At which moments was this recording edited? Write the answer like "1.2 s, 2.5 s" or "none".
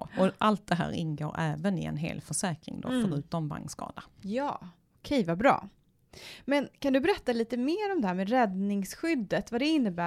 none